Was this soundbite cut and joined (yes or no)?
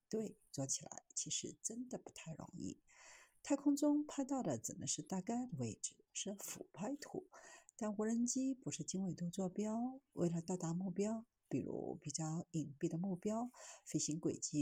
yes